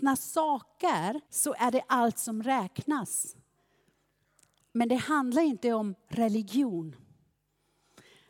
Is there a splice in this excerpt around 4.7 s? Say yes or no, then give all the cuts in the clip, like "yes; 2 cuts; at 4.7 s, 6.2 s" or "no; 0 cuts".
no; 1 cut; at 1.2 s